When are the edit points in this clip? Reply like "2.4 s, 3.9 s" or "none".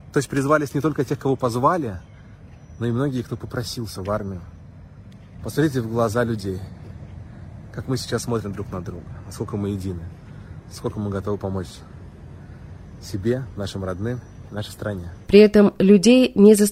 5.4 s, 15.2 s